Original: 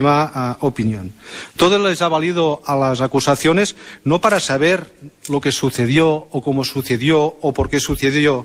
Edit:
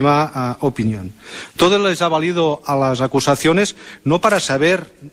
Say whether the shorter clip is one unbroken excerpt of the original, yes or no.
yes